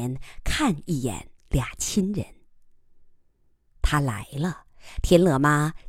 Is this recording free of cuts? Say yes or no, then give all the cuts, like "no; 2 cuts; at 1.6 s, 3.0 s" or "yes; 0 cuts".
yes; 0 cuts